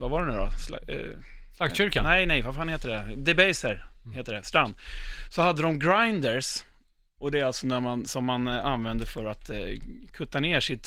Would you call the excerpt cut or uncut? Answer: uncut